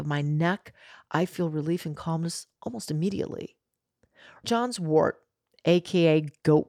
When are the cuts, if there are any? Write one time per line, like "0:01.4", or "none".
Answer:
0:04.4